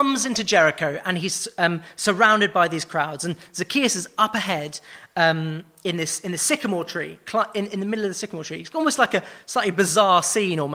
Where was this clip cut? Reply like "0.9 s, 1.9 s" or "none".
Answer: none